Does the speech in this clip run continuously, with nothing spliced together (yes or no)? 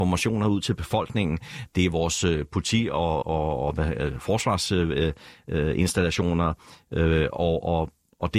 no